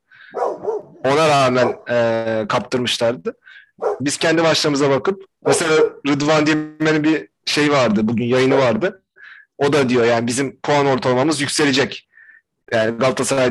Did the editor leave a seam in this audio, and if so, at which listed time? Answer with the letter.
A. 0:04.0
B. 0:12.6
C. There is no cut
A